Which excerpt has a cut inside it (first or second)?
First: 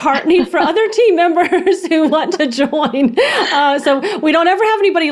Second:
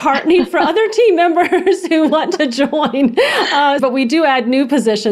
second